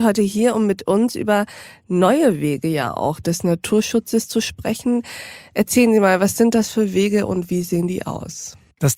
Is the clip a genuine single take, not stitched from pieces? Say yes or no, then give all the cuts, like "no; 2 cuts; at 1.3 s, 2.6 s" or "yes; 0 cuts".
yes; 0 cuts